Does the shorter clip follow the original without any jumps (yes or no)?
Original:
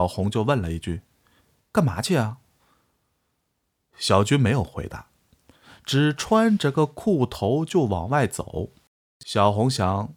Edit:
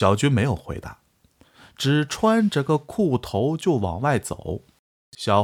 yes